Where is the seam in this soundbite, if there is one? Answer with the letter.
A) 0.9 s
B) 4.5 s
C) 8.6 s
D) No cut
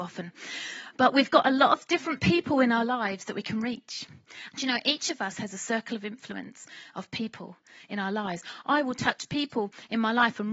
B